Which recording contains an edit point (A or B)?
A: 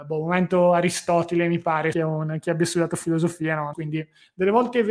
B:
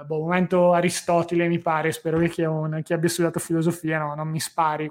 A